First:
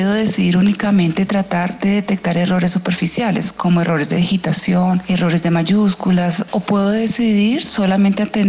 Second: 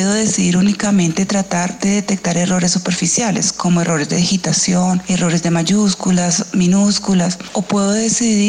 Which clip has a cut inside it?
first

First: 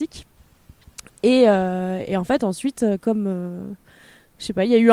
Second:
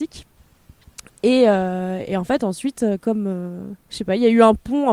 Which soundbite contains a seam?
second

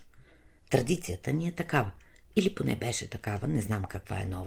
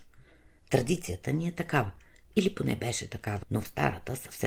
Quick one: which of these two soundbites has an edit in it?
second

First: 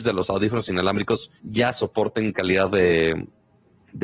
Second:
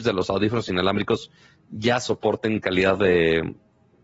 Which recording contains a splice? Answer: first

